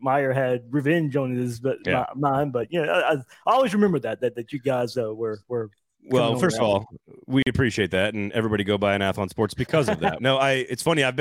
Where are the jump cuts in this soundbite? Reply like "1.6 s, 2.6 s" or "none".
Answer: 10.2 s